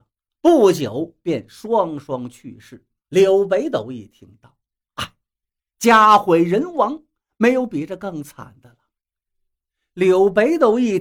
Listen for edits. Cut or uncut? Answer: cut